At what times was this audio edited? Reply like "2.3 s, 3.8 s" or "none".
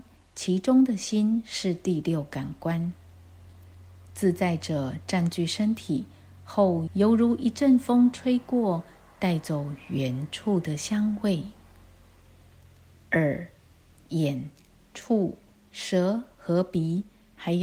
6.9 s